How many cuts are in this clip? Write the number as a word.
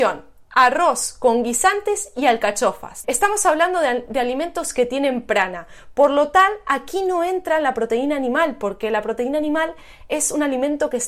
one